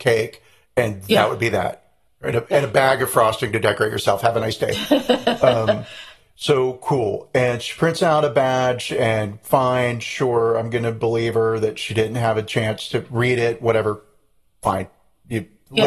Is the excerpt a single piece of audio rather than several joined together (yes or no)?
yes